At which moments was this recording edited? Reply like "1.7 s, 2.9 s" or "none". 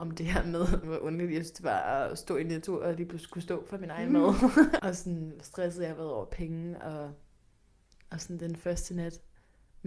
4.8 s